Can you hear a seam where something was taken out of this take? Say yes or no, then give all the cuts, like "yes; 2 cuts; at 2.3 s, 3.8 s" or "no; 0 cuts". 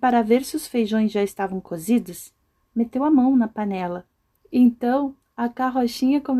yes; 1 cut; at 4.4 s